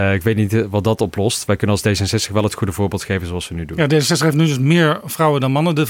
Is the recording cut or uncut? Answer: uncut